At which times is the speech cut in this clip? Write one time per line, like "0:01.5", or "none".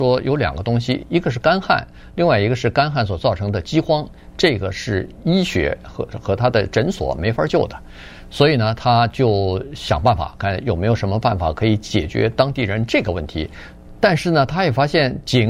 0:10.4
0:14.0